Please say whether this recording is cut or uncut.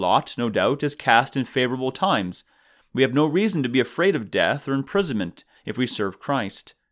cut